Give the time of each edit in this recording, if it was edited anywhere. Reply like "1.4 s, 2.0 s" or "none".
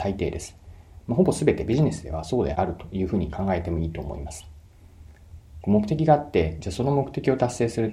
2.5 s